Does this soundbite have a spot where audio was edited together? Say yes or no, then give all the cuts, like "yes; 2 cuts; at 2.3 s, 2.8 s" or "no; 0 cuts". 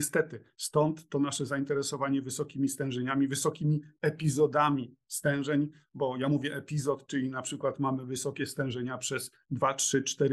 no; 0 cuts